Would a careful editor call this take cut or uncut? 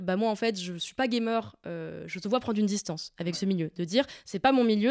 uncut